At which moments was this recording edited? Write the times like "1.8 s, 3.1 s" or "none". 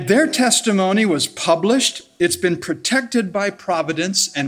none